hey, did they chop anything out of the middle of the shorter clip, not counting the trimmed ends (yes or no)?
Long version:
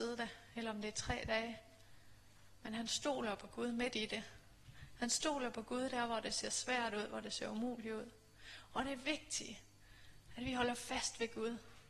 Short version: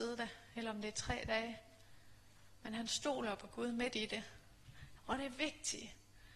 yes